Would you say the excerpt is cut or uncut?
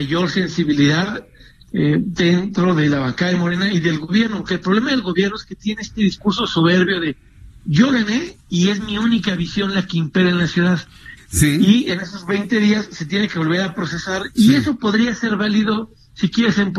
cut